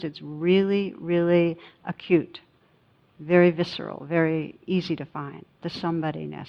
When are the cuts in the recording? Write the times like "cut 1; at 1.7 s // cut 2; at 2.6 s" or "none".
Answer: none